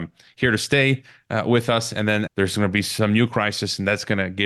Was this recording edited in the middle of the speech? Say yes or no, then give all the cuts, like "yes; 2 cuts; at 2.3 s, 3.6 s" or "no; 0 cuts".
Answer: yes; 1 cut; at 2.3 s